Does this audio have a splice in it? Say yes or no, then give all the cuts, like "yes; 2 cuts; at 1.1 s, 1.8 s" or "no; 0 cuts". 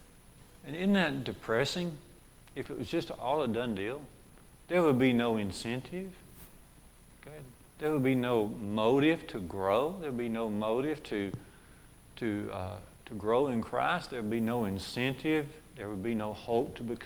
no; 0 cuts